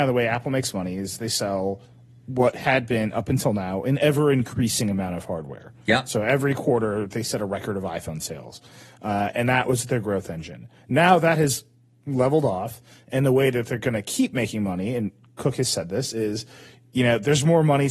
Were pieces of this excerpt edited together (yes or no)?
no